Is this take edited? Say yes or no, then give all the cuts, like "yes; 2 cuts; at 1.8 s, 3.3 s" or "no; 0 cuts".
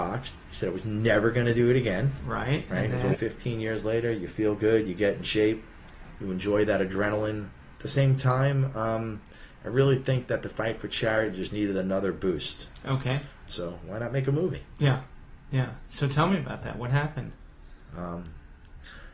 yes; 3 cuts; at 3.1 s, 6.2 s, 13.5 s